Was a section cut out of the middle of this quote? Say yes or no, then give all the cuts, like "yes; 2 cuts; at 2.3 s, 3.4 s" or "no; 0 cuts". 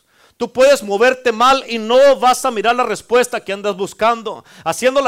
no; 0 cuts